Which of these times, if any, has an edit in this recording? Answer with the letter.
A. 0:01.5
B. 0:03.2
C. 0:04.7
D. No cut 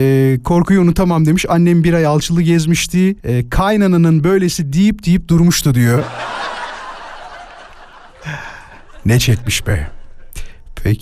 B